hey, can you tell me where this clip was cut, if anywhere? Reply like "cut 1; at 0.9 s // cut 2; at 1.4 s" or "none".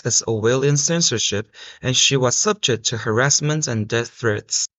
none